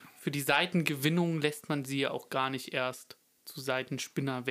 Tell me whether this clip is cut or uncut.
uncut